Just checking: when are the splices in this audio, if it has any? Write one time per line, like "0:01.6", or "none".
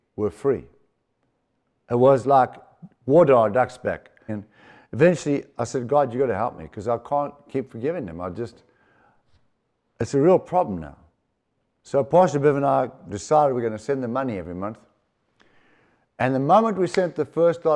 0:04.3
0:11.8